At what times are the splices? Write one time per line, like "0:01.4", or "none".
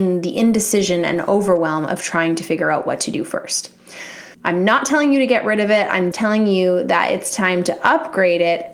0:04.3
0:06.1

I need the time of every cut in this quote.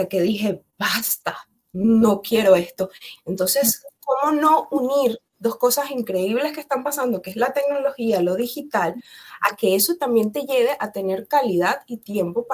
0:03.1

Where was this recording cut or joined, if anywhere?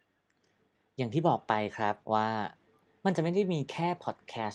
0:02.0

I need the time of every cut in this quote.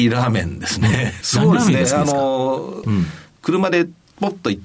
0:01.2
0:02.8

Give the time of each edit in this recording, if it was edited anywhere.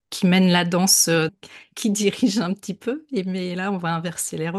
0:01.3

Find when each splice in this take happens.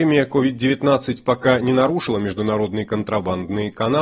none

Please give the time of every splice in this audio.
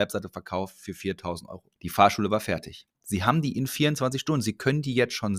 0:01.8
0:02.9

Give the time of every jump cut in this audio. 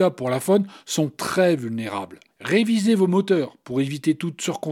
0:02.3

